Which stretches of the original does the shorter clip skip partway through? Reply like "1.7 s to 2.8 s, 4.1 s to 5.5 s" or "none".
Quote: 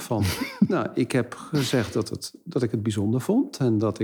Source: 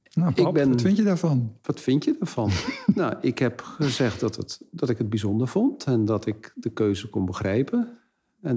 none